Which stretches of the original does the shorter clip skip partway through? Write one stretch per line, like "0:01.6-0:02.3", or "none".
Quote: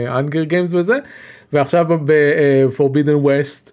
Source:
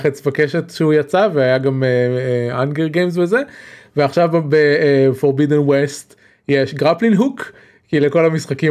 none